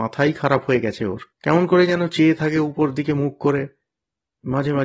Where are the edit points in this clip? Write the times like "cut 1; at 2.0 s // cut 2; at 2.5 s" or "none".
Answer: cut 1; at 1.3 s